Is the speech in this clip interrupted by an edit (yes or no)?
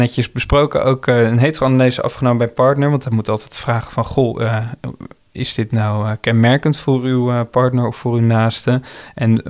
no